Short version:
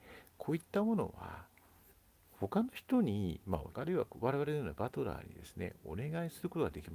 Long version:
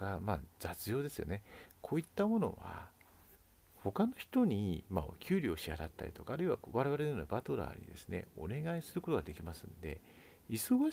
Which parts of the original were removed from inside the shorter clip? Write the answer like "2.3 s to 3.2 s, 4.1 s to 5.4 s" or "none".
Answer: 5.2 s to 6.3 s

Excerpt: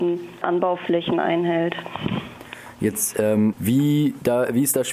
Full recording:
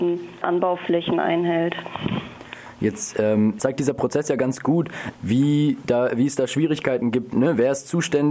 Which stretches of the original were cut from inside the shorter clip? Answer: 3.5 s to 5.2 s

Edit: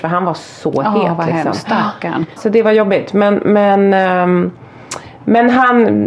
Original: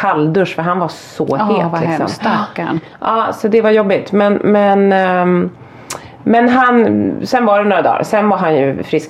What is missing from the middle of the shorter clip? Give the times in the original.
2.9 s to 3.3 s

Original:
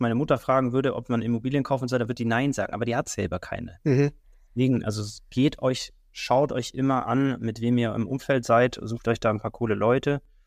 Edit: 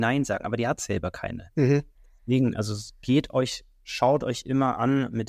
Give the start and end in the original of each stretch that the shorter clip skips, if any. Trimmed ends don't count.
none

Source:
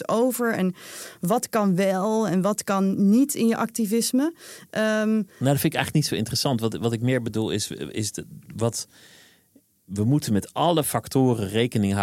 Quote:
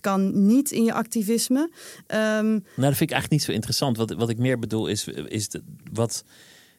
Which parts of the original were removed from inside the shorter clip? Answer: none

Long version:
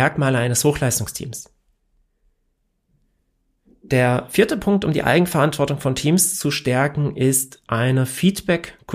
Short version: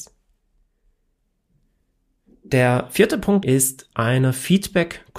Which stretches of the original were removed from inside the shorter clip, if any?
4.8 s to 7.1 s

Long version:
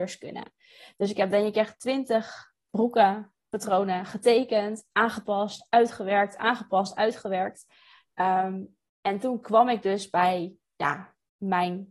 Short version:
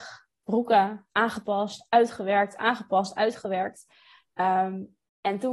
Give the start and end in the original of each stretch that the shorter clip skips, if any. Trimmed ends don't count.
3.4 s to 4.9 s

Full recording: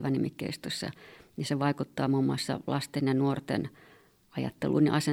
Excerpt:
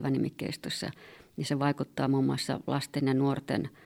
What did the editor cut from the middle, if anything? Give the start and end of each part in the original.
none

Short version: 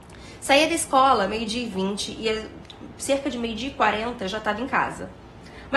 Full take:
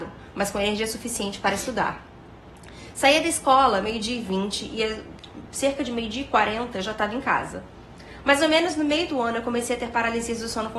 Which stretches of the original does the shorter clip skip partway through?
none

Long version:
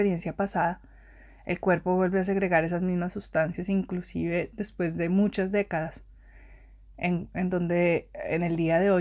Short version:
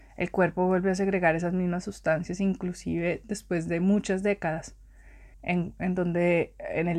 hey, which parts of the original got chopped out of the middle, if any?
6.6 s to 6.9 s

